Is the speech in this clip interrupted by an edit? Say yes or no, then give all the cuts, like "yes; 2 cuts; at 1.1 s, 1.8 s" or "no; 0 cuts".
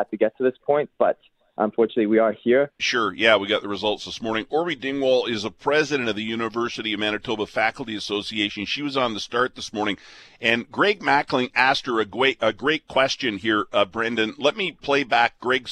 yes; 1 cut; at 2.8 s